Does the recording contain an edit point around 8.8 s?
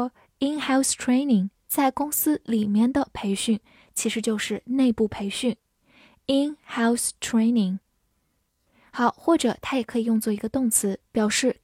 no; 1 cut; at 1.7 s

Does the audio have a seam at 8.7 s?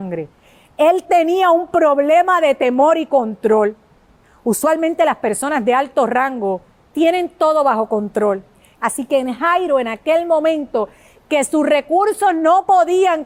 yes; 1 cut; at 8.7 s

